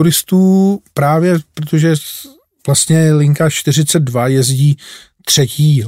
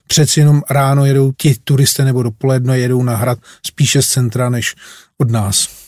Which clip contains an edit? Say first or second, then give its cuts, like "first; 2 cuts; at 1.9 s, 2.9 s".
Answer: second; 1 cut; at 1.3 s